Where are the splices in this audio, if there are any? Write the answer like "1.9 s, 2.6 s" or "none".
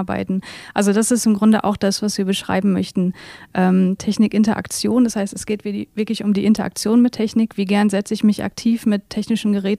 4.0 s